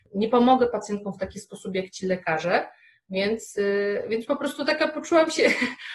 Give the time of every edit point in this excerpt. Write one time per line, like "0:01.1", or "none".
none